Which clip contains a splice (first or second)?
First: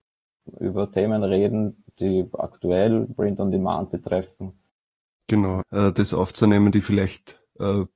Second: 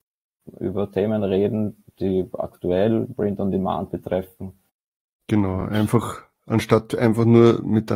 first